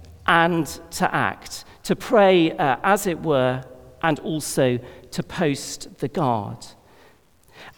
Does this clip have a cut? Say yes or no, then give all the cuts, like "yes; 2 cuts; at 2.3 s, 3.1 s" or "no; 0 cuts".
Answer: no; 0 cuts